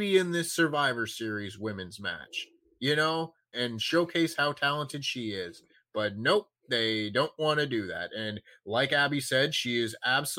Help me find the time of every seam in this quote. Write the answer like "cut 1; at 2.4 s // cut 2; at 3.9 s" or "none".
cut 1; at 3.5 s